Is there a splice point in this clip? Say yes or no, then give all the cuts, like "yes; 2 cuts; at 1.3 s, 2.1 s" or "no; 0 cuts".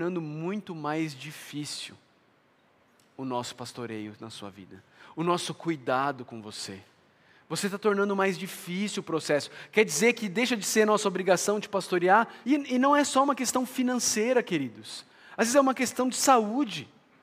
yes; 1 cut; at 12.4 s